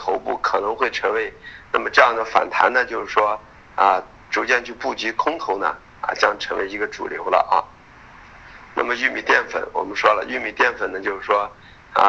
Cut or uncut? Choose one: cut